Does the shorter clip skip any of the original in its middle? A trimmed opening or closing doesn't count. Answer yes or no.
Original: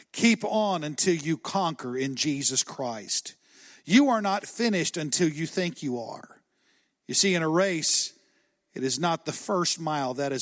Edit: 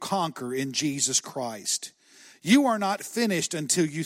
no